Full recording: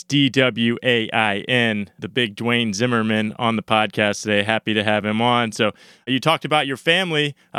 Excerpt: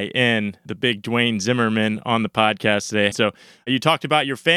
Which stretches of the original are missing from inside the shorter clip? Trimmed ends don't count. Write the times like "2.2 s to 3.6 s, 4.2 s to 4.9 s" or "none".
4.4 s to 5.5 s